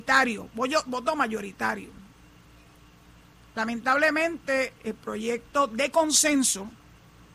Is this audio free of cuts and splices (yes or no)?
no